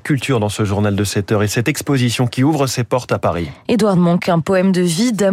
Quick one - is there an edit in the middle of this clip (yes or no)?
no